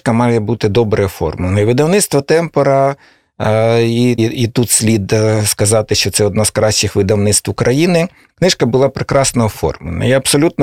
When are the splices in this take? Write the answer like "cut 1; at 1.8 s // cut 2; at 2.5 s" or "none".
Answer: cut 1; at 4.2 s // cut 2; at 8.3 s